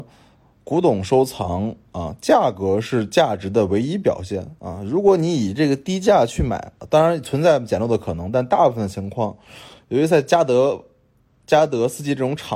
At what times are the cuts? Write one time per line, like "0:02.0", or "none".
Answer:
none